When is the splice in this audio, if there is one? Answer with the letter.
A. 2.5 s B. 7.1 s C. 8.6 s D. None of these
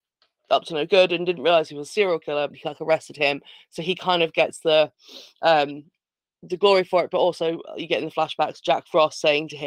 A